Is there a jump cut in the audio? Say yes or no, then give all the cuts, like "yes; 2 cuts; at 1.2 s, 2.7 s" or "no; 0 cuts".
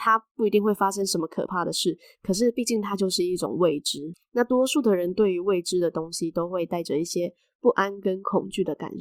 no; 0 cuts